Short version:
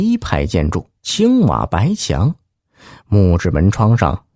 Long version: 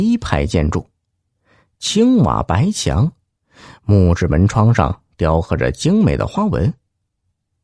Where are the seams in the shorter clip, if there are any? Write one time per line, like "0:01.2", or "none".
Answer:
0:01.0